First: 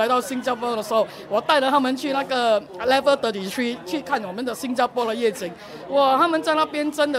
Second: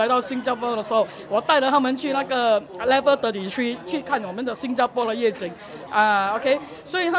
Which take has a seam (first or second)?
second